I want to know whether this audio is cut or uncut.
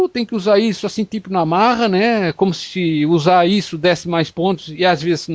uncut